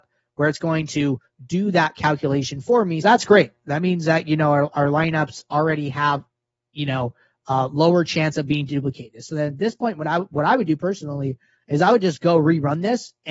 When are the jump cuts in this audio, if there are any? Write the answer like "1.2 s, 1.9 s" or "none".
3.0 s